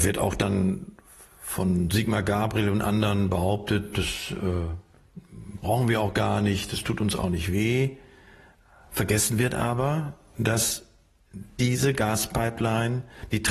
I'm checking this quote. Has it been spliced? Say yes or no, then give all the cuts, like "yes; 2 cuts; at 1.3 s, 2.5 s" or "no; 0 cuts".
no; 0 cuts